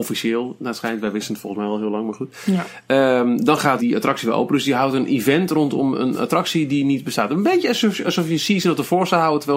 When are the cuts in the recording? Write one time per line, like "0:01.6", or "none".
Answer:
0:03.8